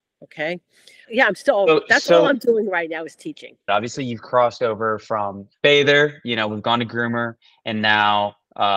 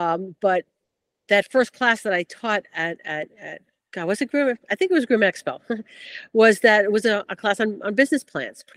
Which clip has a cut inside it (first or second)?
first